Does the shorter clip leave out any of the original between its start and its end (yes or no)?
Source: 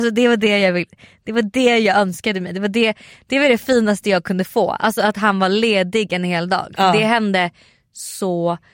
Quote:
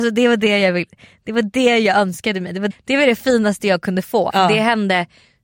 yes